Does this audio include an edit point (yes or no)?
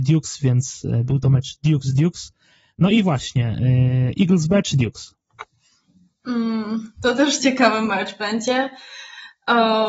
yes